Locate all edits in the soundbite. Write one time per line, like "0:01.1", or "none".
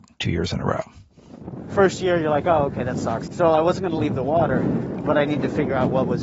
0:03.3